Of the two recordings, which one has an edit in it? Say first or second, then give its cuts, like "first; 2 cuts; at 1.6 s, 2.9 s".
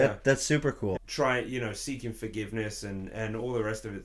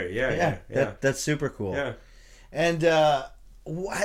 first; 1 cut; at 1.0 s